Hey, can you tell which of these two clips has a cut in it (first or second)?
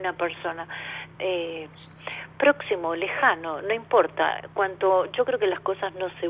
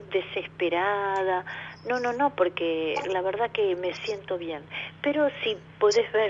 first